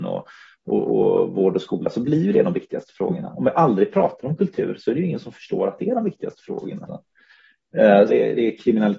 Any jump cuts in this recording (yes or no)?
yes